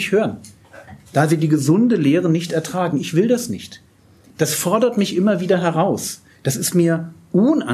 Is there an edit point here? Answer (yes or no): no